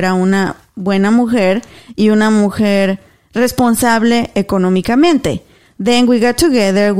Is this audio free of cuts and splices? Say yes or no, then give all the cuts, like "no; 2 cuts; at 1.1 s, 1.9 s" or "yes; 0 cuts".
yes; 0 cuts